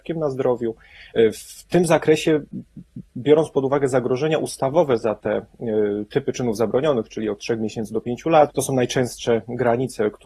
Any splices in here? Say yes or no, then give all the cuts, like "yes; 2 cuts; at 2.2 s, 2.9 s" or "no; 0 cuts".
yes; 1 cut; at 8.5 s